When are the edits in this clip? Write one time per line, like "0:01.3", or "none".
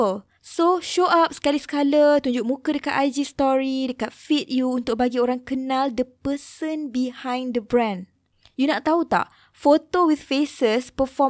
none